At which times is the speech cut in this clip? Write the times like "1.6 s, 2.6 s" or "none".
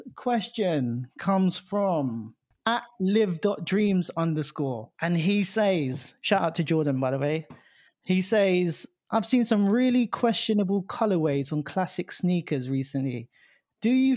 4.9 s